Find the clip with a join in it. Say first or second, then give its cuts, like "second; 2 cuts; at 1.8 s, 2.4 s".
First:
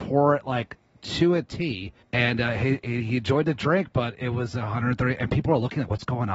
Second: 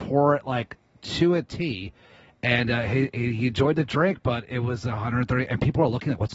first; 1 cut; at 2.0 s